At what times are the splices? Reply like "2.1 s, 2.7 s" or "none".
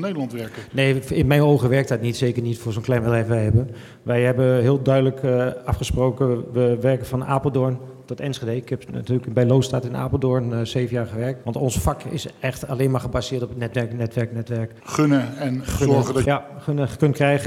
11.4 s, 14.8 s, 16.2 s